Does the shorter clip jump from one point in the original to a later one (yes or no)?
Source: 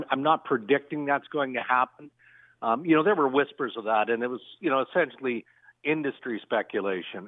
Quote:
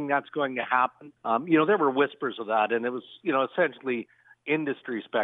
yes